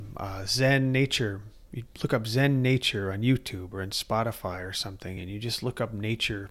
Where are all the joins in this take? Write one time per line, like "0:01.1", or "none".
none